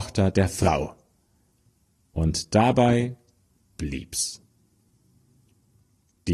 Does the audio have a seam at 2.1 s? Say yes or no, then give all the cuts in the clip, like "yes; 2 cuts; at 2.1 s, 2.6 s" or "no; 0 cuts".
no; 0 cuts